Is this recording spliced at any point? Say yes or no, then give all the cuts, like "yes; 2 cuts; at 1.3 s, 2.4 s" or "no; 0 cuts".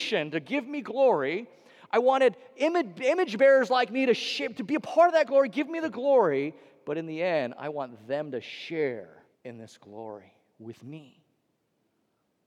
yes; 1 cut; at 9.3 s